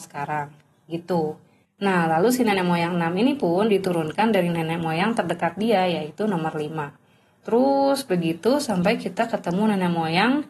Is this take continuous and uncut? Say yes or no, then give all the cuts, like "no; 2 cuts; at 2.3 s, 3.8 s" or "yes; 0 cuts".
no; 1 cut; at 1.6 s